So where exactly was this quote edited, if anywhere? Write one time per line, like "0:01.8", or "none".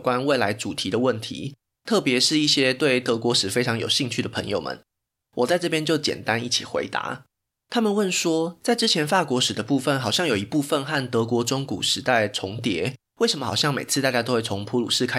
0:13.1